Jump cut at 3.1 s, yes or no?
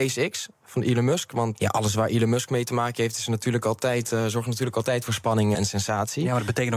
no